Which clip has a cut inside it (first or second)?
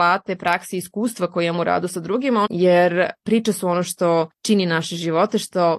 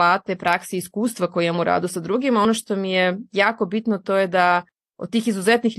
first